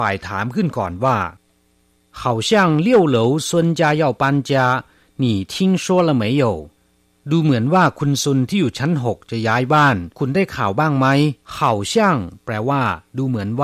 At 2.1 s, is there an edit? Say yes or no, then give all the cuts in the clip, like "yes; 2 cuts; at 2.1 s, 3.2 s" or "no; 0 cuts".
no; 2 cuts; at 10.1 s, 11.4 s